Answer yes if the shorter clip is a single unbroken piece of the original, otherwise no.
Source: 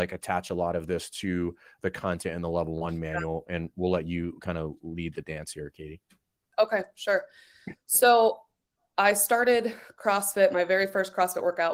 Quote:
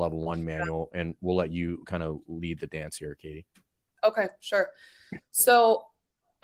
yes